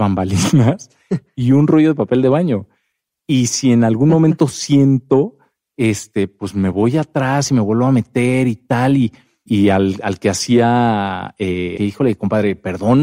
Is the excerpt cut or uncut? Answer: cut